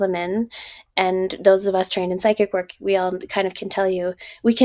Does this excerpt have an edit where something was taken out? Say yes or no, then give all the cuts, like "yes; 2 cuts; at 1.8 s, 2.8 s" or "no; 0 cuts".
no; 0 cuts